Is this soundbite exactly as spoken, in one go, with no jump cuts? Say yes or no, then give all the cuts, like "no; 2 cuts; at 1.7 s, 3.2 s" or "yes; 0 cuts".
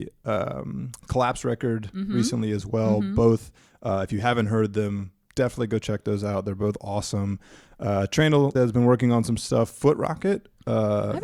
no; 1 cut; at 8.5 s